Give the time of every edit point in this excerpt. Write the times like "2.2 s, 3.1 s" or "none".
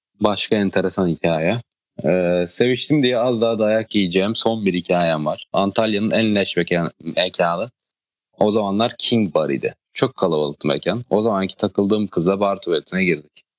5.5 s, 9.8 s